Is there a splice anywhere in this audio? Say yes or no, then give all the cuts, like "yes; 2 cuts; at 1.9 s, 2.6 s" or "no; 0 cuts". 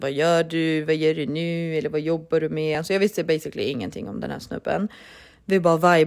no; 0 cuts